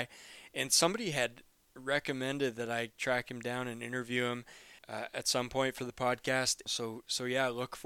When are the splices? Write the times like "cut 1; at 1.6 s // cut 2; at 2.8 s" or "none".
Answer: cut 1; at 4.8 s // cut 2; at 6.7 s